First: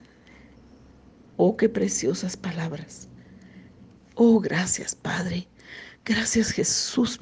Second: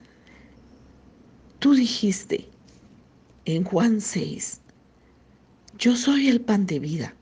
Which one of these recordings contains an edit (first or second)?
first